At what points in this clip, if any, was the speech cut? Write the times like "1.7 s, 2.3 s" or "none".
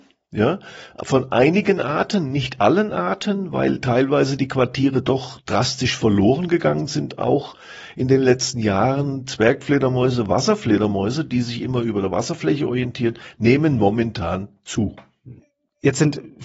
none